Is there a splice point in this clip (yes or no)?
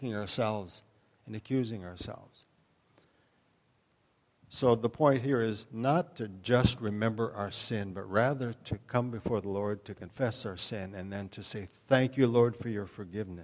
no